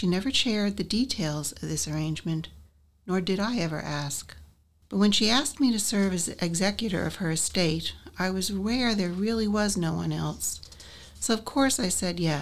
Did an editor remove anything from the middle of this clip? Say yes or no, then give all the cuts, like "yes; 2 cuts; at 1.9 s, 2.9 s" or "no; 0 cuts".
no; 0 cuts